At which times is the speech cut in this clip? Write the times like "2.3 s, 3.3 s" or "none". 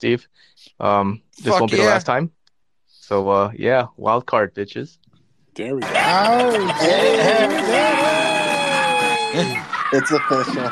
none